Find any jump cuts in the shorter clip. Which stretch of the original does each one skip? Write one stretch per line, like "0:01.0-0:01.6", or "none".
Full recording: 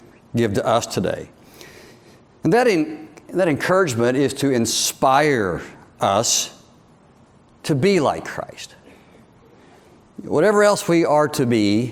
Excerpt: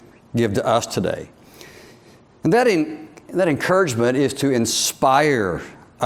none